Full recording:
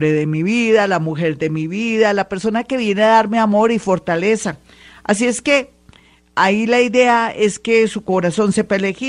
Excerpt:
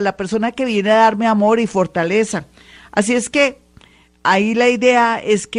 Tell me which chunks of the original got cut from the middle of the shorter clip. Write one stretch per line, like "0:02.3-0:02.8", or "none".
none